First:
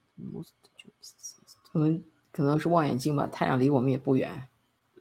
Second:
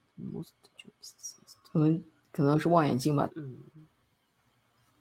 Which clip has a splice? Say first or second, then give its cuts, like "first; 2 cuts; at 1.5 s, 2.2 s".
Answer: second; 1 cut; at 3.3 s